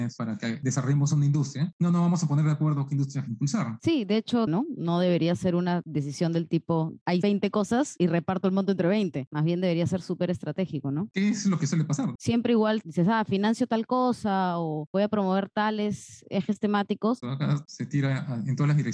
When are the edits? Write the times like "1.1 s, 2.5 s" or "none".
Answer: 4.5 s, 12.2 s, 17.2 s